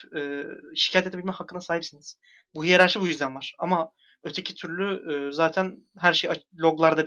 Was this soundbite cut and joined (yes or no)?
no